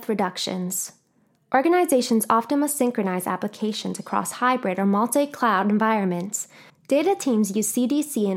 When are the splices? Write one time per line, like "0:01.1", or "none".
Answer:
0:06.7